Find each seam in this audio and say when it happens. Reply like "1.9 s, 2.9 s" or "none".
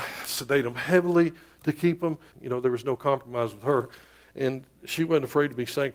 2.3 s